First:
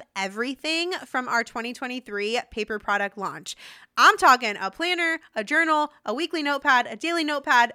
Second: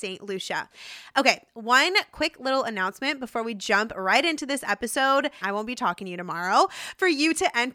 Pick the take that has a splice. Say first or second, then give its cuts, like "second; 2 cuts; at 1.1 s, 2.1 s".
second; 1 cut; at 5.4 s